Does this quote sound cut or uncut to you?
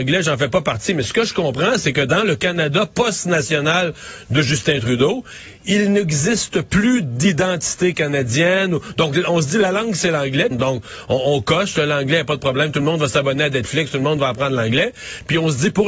cut